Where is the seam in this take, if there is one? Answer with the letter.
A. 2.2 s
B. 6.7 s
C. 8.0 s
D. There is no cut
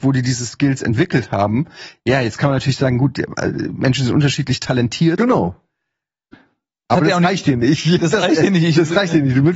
D